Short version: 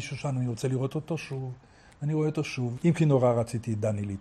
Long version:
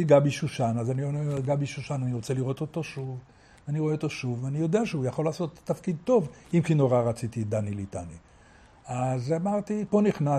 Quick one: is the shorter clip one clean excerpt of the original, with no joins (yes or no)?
no